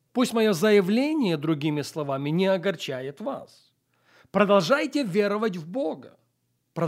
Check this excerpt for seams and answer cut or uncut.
uncut